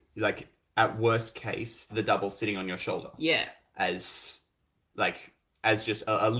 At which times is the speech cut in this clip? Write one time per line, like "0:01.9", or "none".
0:01.9